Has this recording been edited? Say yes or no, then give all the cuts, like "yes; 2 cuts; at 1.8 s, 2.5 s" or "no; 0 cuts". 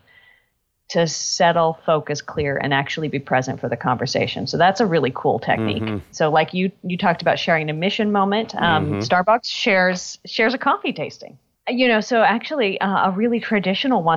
yes; 2 cuts; at 6.1 s, 11.6 s